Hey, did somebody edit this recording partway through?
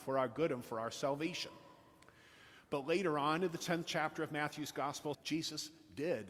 yes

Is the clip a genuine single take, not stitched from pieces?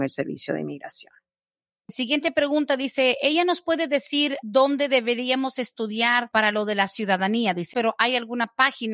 no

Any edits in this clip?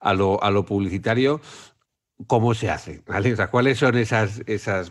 no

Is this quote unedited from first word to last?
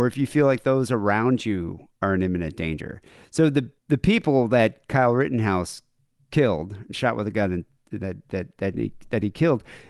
no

